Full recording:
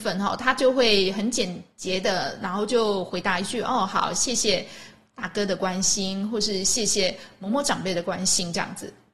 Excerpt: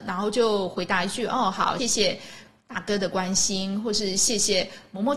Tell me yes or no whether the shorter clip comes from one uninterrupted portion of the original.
no